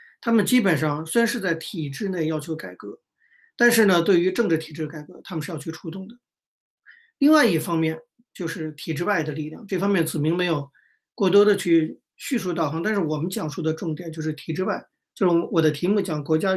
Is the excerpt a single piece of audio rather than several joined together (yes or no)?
yes